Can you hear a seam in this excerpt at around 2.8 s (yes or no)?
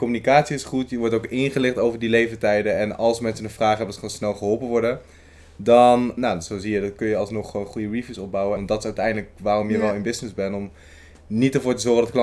no